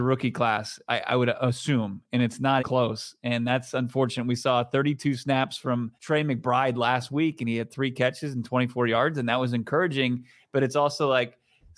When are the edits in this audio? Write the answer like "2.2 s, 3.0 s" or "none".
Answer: 2.6 s, 6.0 s